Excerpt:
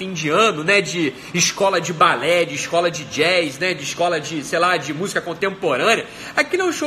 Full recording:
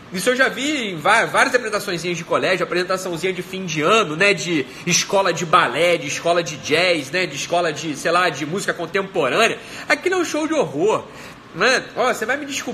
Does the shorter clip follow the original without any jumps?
yes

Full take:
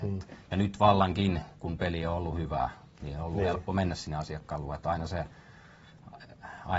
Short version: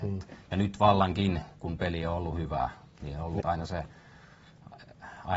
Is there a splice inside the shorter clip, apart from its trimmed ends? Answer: yes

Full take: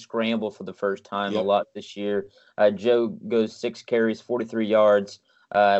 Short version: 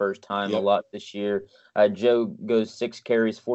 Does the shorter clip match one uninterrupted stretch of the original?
yes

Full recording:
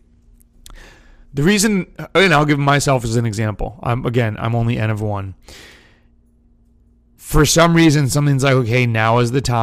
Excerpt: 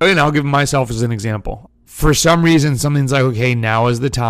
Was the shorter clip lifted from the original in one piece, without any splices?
no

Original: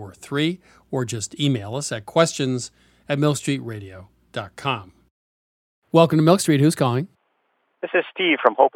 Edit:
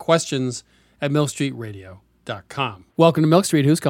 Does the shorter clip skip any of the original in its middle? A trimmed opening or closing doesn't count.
yes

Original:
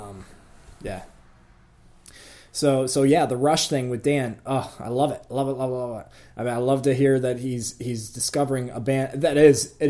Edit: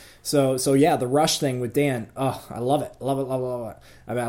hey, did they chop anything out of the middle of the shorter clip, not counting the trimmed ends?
no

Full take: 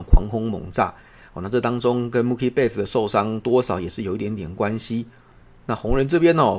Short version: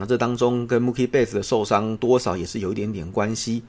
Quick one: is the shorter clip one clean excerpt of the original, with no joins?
yes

